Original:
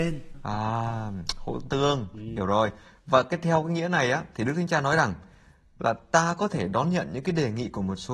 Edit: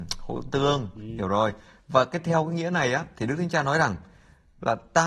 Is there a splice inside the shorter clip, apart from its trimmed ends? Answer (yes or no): no